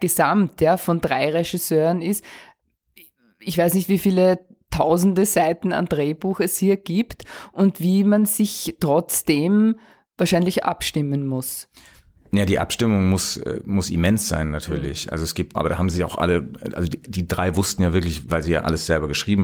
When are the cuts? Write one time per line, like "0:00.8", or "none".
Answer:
0:15.5
0:18.3